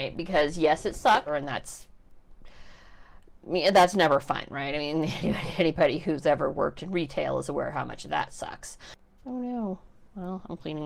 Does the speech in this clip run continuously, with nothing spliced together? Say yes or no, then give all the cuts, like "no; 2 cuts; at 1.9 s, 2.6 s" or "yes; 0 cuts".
no; 2 cuts; at 1.3 s, 9.2 s